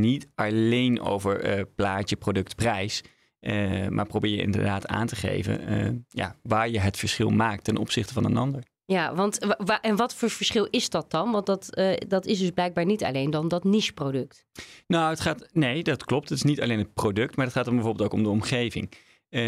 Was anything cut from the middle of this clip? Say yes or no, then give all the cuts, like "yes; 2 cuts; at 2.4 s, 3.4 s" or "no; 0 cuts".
no; 0 cuts